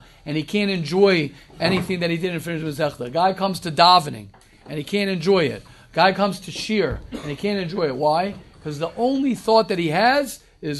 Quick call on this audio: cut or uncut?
uncut